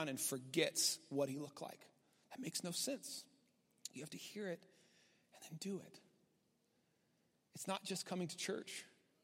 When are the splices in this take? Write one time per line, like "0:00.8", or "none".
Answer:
none